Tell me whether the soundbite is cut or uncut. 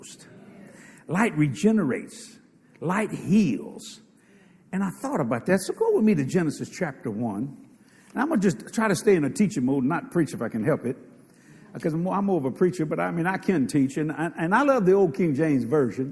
uncut